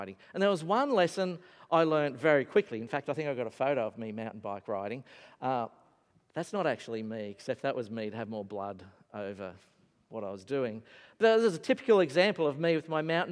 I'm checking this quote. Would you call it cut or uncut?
uncut